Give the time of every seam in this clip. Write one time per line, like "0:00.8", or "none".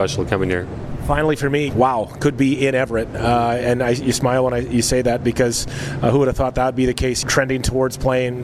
0:01.7